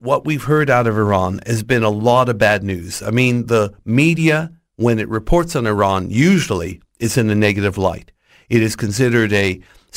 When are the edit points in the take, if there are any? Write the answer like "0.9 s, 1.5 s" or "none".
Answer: none